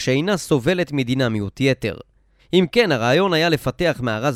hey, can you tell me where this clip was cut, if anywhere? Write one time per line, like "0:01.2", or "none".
0:02.4